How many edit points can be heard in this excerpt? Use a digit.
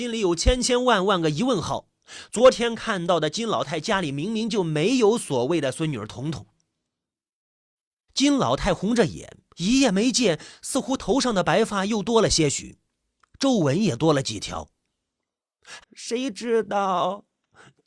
3